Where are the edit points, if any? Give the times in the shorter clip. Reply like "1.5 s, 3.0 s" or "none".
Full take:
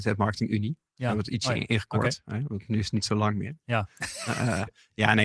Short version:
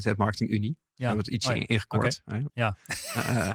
2.5 s